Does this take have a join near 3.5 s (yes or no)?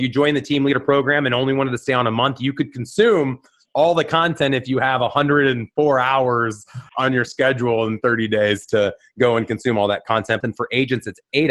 no